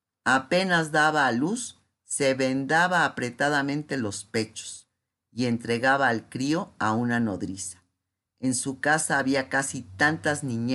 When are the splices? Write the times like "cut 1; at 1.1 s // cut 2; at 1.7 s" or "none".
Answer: none

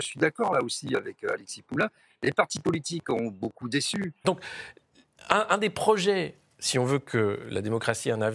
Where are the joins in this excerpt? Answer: cut 1; at 4.2 s

